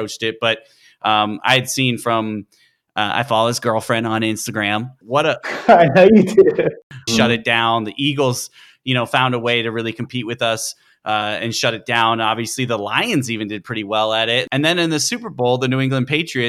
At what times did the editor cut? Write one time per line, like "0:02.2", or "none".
0:05.0
0:07.1